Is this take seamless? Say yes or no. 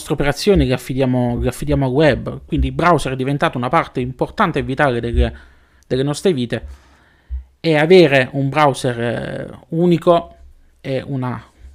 yes